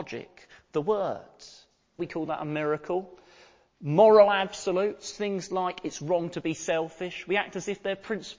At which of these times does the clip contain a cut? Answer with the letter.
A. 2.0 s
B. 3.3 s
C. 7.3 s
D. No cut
A